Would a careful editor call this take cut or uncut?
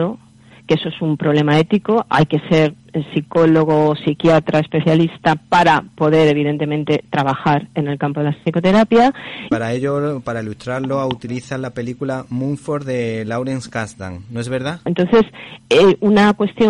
cut